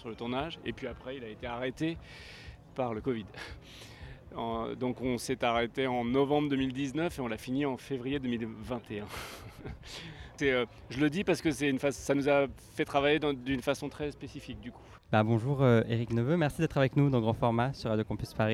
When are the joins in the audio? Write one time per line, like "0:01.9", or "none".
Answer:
0:10.4
0:15.0